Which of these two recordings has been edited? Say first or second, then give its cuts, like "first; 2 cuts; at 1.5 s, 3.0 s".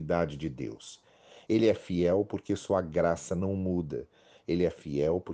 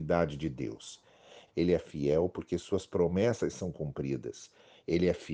second; 1 cut; at 1.5 s